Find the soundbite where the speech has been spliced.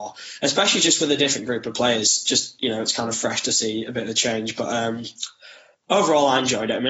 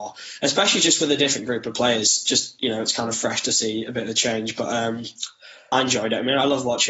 second; 1 cut; at 5.7 s

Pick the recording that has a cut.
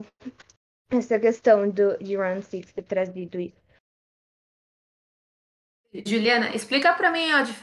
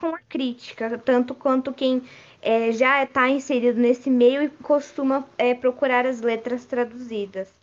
first; 1 cut; at 6.1 s

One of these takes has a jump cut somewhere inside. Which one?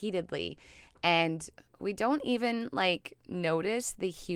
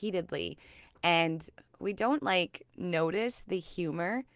second; 1 cut; at 2.2 s

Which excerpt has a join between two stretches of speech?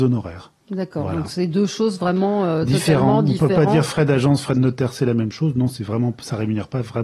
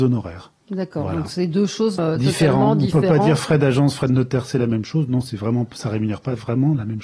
second; 1 cut; at 2.0 s

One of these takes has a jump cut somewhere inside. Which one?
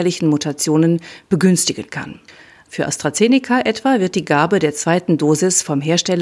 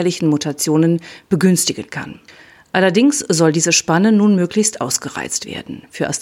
first; 1 cut; at 2.7 s

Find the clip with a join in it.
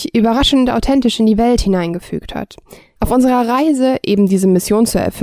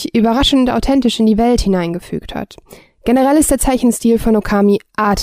first; 1 cut; at 3.0 s

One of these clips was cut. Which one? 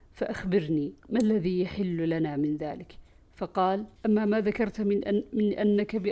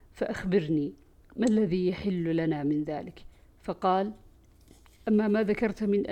first; 2 cuts; at 1.0 s, 4.0 s

